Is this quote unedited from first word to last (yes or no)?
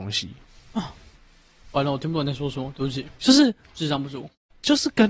yes